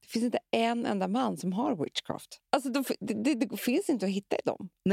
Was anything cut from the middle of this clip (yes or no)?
yes